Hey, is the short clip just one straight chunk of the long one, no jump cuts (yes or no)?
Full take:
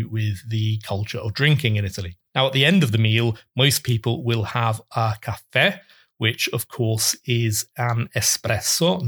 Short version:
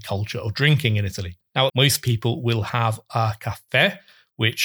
no